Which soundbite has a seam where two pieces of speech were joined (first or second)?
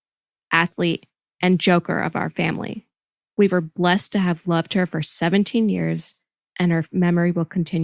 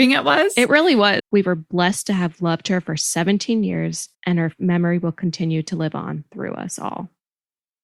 second